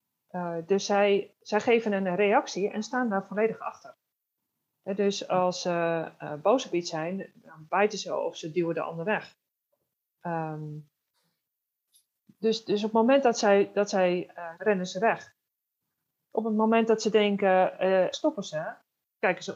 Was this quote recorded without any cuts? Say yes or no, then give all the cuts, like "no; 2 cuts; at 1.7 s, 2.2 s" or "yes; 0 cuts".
no; 2 cuts; at 14.5 s, 18.1 s